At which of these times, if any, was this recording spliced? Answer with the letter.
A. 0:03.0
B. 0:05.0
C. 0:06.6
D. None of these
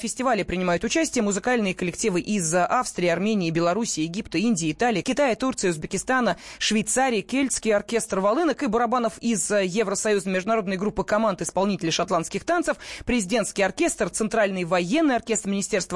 B